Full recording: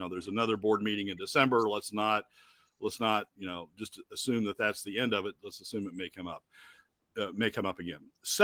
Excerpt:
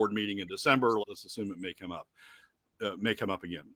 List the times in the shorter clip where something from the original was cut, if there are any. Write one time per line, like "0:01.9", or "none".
0:01.0